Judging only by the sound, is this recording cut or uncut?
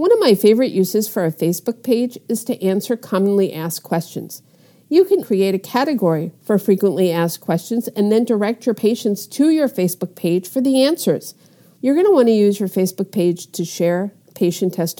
cut